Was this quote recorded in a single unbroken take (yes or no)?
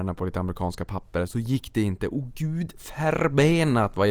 no